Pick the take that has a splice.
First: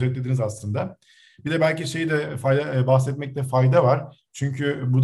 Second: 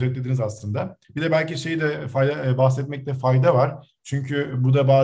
second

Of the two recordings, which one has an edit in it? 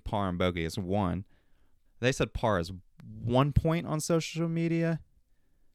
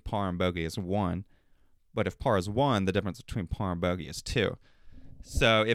first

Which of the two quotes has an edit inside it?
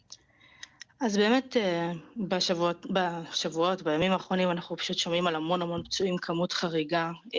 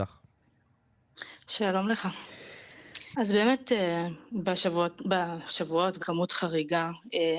second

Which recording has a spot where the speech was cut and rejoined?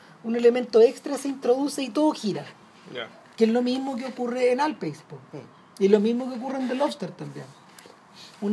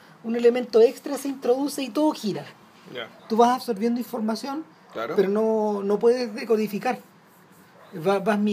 second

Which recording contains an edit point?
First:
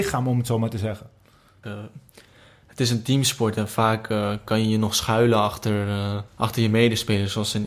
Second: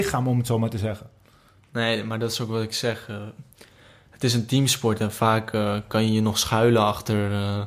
first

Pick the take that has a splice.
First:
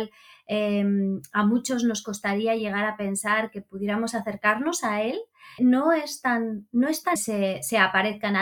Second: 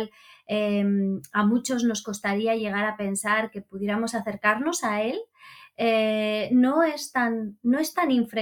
first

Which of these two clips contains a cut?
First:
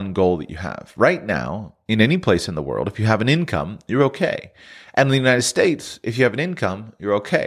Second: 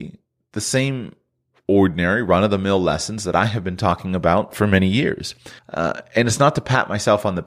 second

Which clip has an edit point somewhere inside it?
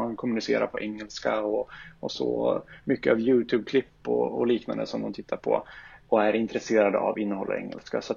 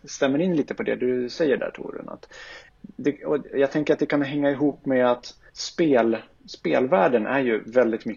second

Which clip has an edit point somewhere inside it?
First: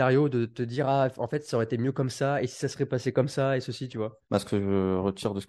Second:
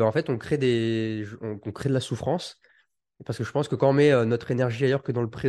first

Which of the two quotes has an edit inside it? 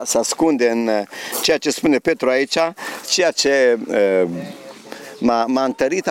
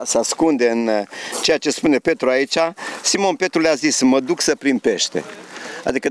first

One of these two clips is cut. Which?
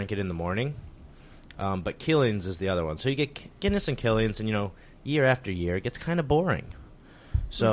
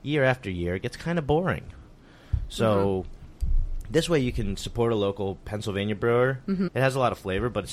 second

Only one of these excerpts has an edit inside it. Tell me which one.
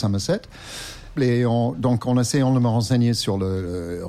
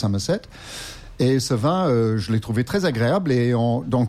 first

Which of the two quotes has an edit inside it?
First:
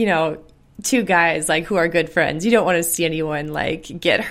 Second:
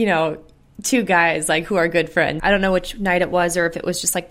second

